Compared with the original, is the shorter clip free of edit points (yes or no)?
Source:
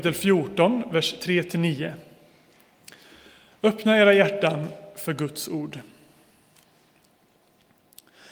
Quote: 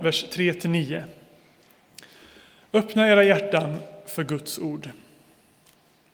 yes